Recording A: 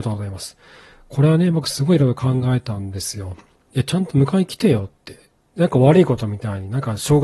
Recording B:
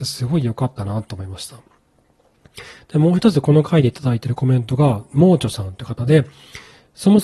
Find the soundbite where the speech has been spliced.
A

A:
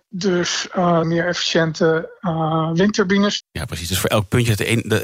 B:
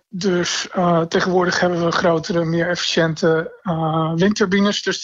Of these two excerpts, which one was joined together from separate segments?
A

